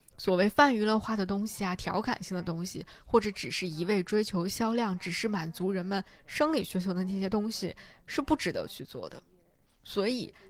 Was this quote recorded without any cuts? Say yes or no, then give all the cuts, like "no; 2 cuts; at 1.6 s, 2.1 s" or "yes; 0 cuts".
yes; 0 cuts